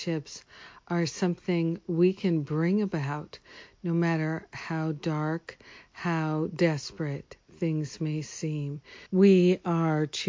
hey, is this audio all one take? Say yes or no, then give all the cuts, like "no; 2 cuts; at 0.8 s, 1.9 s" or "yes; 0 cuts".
no; 1 cut; at 9.1 s